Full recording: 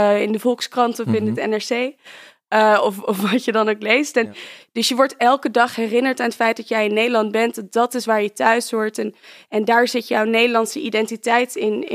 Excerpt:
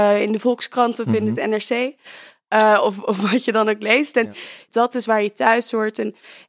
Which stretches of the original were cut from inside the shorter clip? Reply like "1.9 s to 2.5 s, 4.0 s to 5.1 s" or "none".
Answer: 4.7 s to 7.7 s